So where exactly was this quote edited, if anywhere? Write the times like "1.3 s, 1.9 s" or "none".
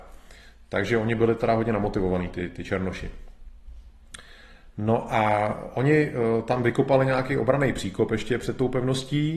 none